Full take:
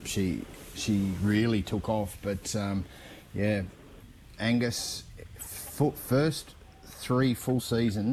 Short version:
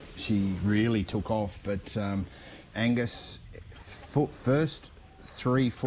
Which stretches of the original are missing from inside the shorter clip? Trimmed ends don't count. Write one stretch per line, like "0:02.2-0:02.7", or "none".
0:03.3-0:04.4